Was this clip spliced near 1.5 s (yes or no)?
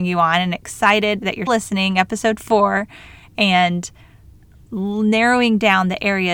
yes